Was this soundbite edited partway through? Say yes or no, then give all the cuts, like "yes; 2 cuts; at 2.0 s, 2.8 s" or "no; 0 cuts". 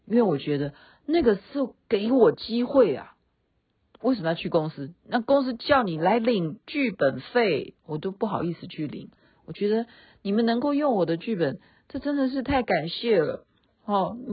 no; 0 cuts